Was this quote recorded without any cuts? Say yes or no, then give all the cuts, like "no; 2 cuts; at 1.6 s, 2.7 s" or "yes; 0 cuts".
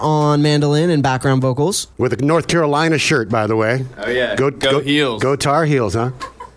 no; 1 cut; at 1.9 s